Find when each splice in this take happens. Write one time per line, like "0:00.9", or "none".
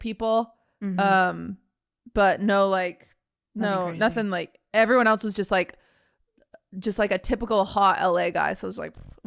none